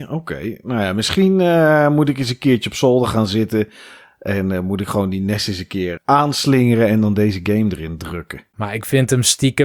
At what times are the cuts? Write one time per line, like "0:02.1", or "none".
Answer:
0:06.0
0:08.5